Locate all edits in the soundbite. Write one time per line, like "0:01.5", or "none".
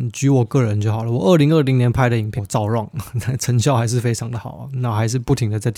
0:02.4